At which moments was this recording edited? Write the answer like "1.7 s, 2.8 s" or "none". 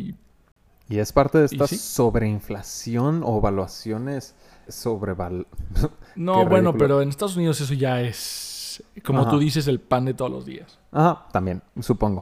4.7 s